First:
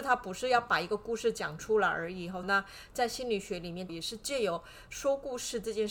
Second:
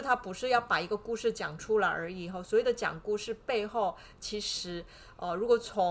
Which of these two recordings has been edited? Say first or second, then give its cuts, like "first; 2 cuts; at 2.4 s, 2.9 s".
first; 2 cuts; at 2.4 s, 3.9 s